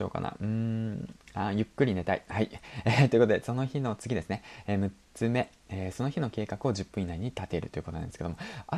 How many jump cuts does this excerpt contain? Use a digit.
0